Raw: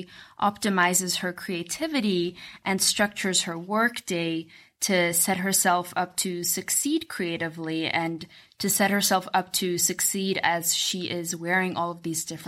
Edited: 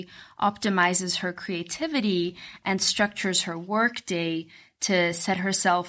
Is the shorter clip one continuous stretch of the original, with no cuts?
yes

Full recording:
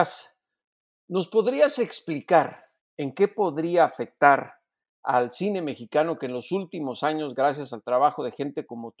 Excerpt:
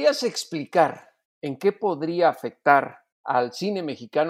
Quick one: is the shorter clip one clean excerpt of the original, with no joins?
no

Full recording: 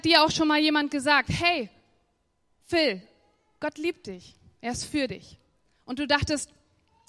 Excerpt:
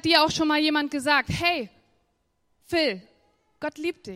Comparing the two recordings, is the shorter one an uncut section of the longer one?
yes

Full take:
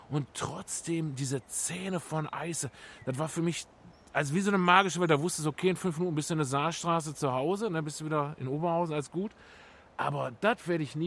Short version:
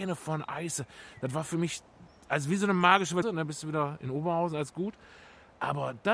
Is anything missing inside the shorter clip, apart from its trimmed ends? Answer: yes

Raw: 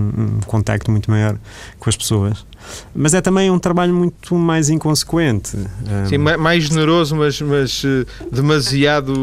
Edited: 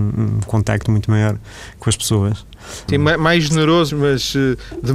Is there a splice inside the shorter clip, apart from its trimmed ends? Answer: yes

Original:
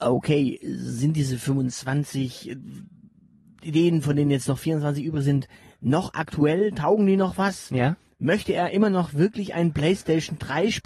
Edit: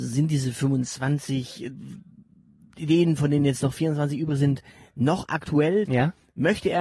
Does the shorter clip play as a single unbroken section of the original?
no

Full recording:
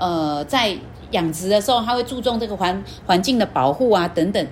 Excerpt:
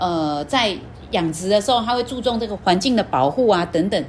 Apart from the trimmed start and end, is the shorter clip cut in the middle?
yes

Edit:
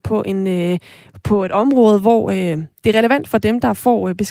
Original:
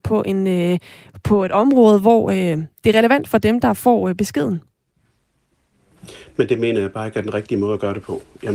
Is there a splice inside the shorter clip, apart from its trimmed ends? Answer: no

